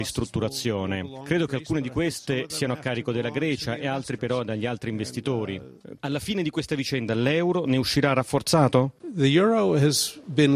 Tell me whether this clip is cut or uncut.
cut